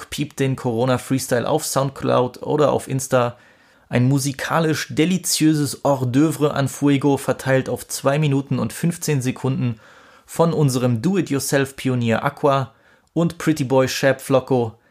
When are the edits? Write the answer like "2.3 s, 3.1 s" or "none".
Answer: 3.7 s